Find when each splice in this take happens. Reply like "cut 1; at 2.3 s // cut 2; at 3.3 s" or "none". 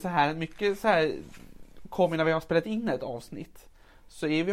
none